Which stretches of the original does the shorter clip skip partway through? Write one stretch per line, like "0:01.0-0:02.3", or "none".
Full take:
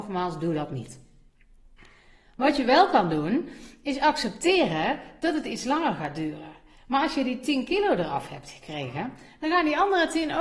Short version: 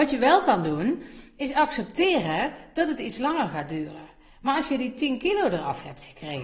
none